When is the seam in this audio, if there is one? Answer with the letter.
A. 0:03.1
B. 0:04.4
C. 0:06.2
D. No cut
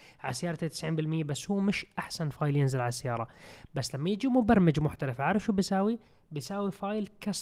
D